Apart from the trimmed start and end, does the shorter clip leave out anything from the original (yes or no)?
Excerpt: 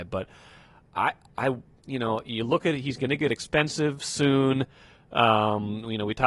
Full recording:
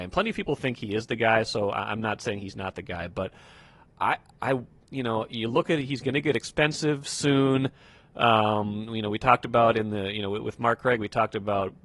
no